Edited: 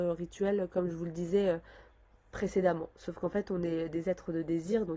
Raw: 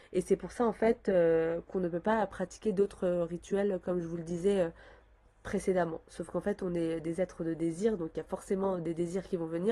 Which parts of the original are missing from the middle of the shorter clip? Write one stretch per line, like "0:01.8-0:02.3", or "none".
none